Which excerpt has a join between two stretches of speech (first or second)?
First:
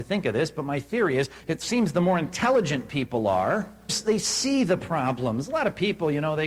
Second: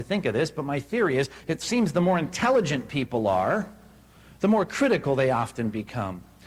first